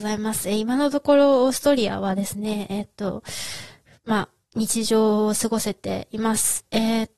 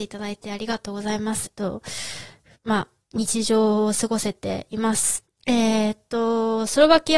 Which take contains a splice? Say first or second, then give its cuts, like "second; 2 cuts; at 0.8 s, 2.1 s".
second; 2 cuts; at 1.5 s, 5.3 s